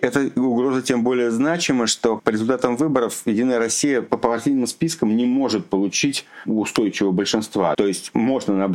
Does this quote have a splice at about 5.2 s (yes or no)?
no